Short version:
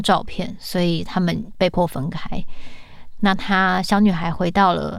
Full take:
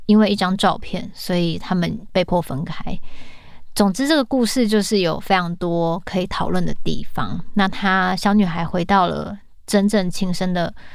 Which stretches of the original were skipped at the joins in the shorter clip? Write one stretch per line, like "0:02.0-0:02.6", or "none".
0:03.7-0:07.5